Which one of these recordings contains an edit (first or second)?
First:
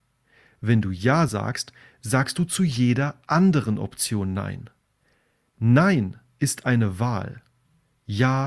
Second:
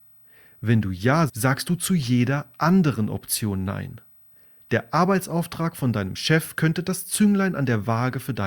second